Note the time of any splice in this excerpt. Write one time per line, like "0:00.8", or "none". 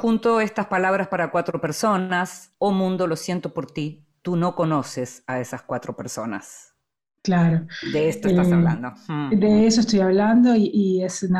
0:02.5